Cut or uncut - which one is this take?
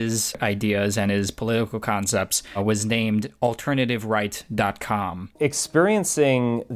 cut